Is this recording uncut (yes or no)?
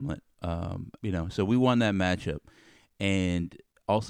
no